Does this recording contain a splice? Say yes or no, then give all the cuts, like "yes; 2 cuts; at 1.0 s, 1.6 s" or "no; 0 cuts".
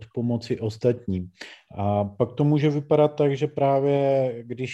no; 0 cuts